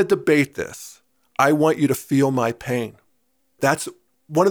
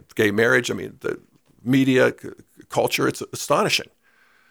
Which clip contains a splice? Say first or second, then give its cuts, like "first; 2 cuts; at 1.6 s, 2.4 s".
first; 1 cut; at 3.6 s